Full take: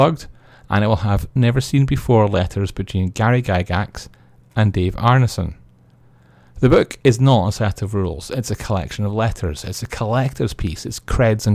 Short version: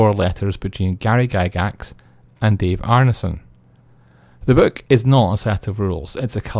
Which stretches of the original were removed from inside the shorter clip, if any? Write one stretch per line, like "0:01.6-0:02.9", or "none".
none